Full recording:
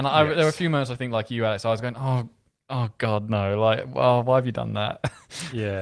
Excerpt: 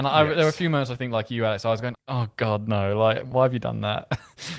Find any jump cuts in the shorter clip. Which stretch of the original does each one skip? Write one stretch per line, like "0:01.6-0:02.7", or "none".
0:01.9-0:02.6
0:03.9-0:04.2